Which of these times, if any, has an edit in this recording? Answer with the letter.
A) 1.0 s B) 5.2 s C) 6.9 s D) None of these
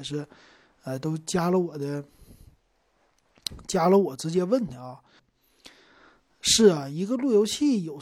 B